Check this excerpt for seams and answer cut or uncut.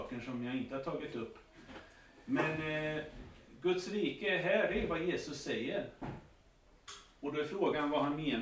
uncut